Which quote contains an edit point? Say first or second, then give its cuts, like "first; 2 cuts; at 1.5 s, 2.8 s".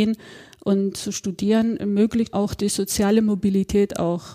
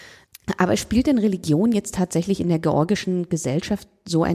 first; 1 cut; at 2.3 s